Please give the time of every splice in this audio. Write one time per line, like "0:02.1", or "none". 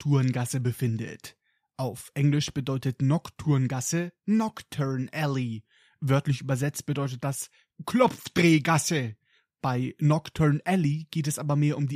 none